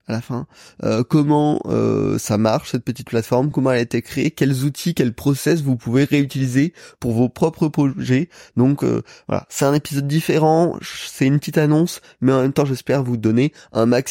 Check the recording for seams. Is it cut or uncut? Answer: uncut